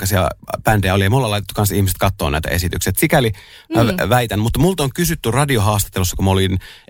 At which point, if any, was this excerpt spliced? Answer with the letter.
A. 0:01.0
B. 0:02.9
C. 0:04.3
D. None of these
D